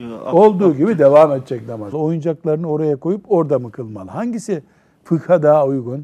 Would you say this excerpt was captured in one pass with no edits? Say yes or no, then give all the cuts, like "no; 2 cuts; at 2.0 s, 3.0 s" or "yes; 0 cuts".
no; 1 cut; at 1.9 s